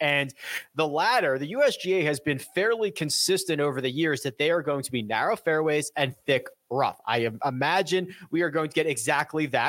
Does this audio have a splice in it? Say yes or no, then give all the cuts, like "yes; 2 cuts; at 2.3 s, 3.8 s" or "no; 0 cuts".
no; 0 cuts